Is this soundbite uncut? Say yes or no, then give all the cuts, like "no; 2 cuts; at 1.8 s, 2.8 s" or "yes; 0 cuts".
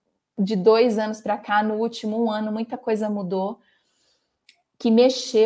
yes; 0 cuts